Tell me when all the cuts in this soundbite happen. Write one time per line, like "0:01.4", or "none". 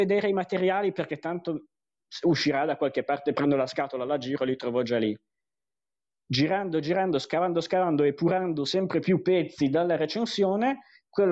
none